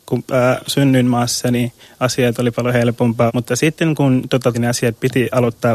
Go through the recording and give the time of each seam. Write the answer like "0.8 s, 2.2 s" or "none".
3.3 s, 4.5 s